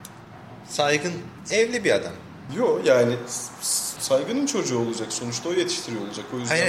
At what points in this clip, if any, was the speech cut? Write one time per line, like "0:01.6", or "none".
0:02.5
0:04.0

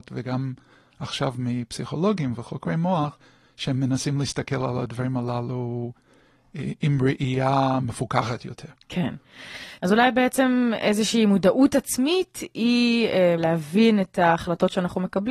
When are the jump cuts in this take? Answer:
0:09.8
0:13.4

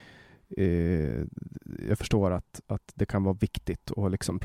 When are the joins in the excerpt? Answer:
none

